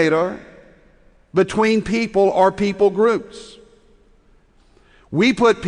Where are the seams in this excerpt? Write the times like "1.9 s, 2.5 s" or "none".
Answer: none

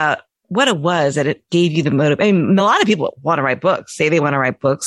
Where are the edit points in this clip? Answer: none

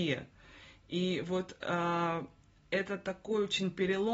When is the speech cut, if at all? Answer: none

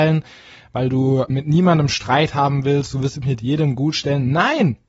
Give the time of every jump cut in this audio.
1.3 s

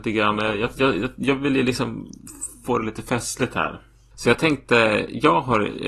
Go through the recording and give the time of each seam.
4.1 s

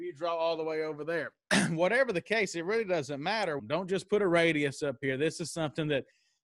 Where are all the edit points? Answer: 3.6 s

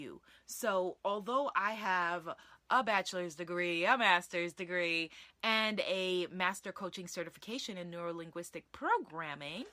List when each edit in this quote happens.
none

